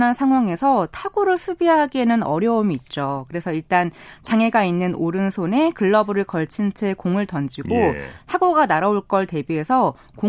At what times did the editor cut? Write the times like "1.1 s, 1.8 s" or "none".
none